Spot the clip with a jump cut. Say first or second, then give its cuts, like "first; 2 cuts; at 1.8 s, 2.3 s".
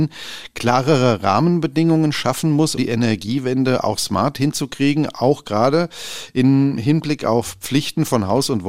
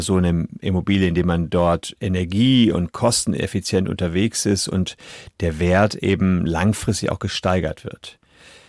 first; 1 cut; at 2.8 s